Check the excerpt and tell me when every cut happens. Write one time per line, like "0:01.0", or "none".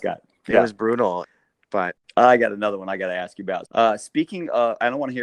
0:01.2
0:03.7

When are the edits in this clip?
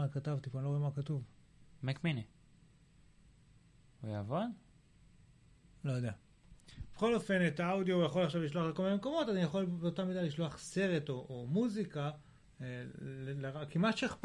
none

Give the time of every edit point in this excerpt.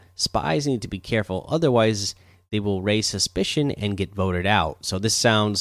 none

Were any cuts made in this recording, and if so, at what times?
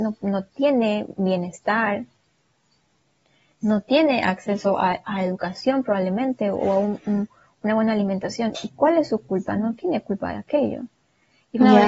none

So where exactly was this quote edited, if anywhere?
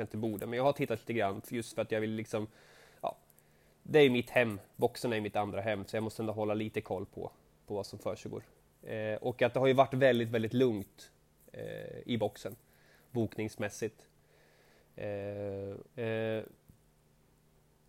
0:15.8

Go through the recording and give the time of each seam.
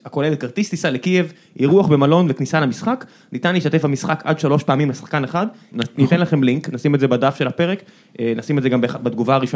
0:05.7

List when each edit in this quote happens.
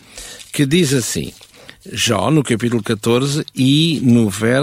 none

